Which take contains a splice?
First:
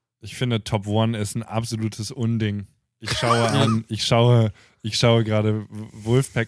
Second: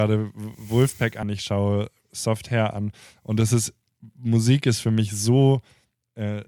second; 1 cut; at 1.2 s

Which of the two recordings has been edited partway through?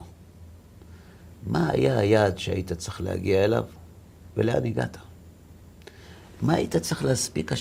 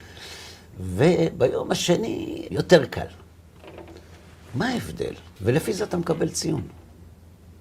second; 2 cuts; at 2.5 s, 5.4 s

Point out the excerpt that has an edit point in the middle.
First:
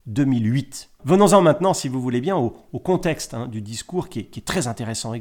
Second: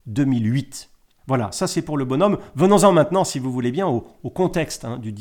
first; 1 cut; at 1.0 s

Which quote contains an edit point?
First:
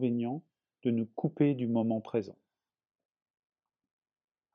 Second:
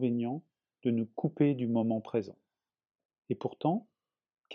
second; 1 cut; at 3.1 s

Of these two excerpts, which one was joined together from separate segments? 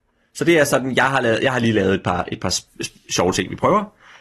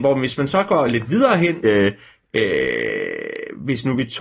second; 1 cut; at 1.6 s

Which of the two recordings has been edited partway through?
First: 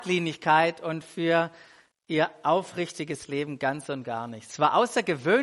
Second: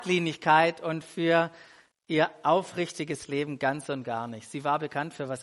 first; 1 cut; at 4.5 s

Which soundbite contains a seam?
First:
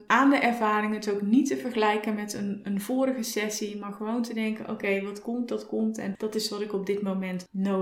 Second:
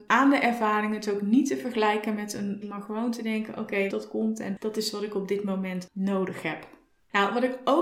second; 2 cuts; at 2.6 s, 3.9 s

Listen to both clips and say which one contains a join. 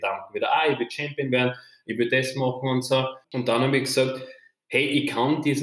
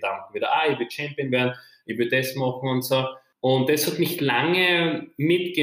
first; 1 cut; at 3.2 s

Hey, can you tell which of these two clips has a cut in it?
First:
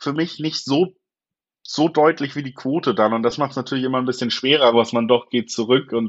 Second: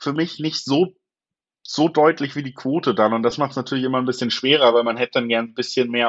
first; 1 cut; at 4.7 s

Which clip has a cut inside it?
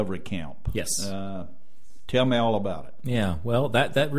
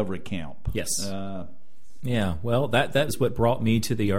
second; 2 cuts; at 2.0 s, 3.1 s

